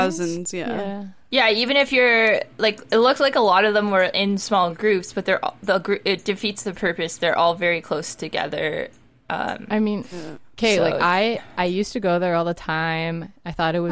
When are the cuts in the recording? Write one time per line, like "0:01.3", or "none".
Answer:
none